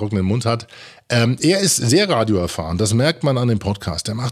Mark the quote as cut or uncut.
uncut